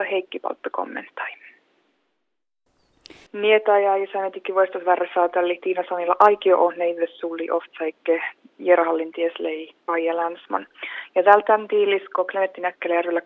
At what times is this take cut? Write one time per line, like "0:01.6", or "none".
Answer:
0:03.3